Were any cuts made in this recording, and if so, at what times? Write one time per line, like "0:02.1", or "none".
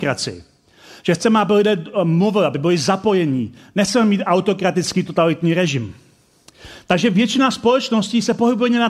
none